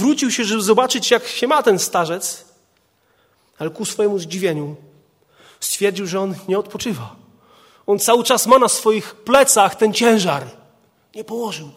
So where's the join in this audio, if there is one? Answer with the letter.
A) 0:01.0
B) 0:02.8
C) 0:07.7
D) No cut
D